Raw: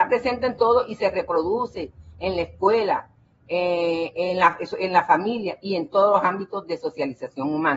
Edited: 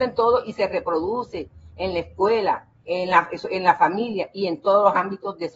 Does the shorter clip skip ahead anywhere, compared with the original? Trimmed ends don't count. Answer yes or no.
yes